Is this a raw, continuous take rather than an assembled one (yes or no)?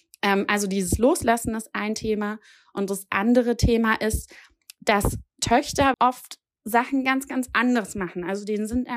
no